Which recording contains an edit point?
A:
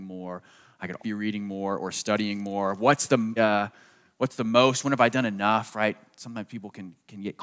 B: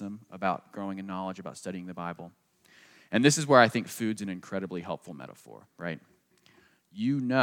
A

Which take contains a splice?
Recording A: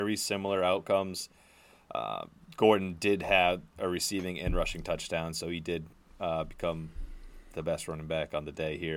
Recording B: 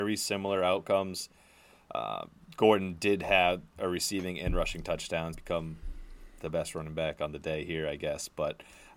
B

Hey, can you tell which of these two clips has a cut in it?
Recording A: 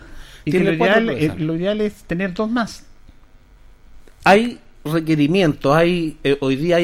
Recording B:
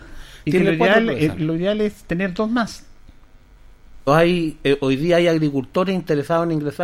B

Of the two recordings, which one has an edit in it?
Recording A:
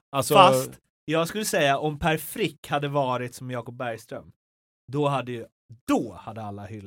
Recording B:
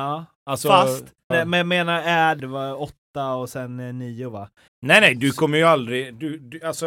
B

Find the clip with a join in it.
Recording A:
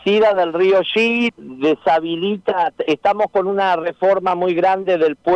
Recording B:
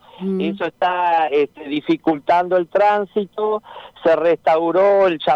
A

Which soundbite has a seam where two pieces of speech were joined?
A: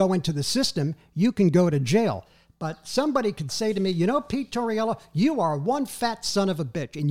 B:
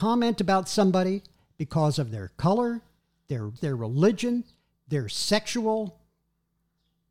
B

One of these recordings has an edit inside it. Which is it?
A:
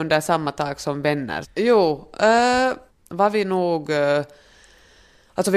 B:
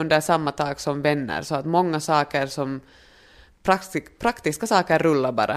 A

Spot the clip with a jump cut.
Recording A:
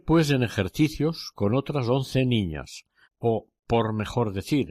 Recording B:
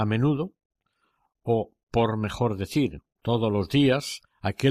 A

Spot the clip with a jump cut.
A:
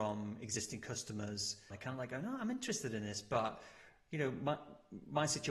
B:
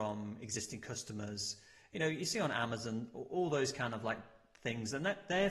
A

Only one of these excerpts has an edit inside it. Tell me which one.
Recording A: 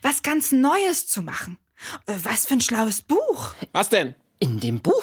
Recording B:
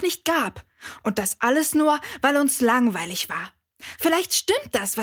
A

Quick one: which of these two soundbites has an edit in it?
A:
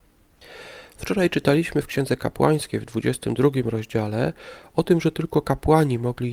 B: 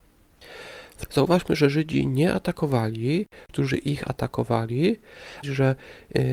B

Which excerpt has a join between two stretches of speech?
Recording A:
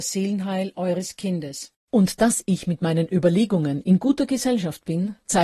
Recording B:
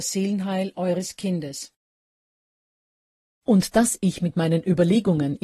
A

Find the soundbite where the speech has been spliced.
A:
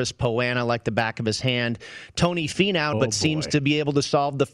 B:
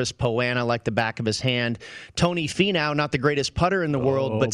A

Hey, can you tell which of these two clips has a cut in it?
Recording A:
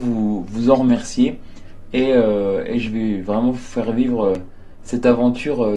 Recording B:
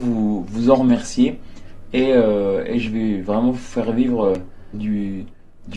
B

